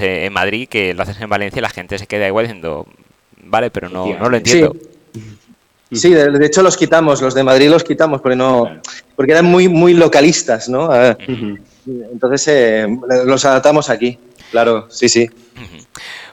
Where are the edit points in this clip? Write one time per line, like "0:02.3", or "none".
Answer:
none